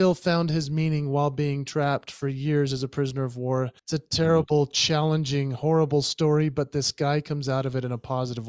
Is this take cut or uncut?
cut